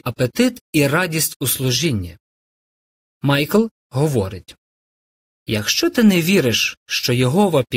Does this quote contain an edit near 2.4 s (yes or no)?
no